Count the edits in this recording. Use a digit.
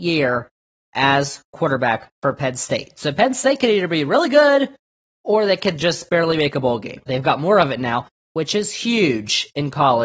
2